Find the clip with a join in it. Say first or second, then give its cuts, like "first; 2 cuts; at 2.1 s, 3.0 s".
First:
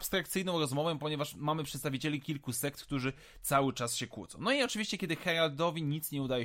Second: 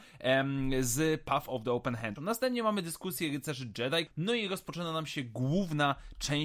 second; 2 cuts; at 2.2 s, 4.1 s